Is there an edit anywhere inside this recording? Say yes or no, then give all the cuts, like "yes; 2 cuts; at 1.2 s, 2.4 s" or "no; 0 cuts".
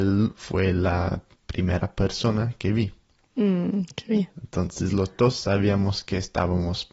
no; 0 cuts